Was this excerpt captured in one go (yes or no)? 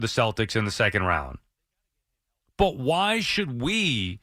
yes